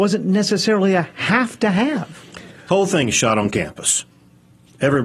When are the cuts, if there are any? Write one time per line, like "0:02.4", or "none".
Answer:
0:02.7